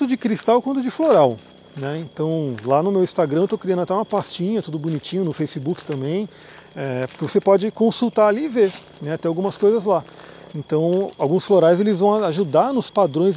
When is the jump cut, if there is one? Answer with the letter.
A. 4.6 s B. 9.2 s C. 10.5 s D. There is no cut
C